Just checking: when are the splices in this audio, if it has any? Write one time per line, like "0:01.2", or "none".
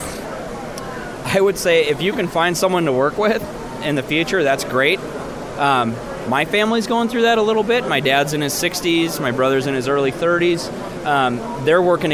0:05.5